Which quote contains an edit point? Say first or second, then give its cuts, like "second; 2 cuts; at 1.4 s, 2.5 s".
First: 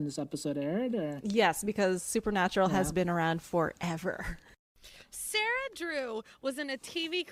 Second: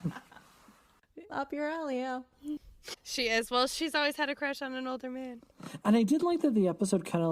second; 2 cuts; at 1.3 s, 2.9 s